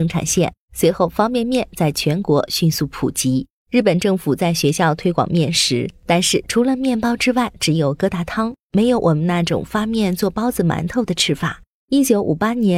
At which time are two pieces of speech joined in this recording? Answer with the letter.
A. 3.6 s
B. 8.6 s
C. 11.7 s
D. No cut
A